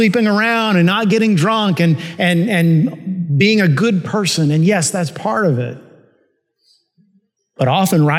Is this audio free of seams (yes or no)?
yes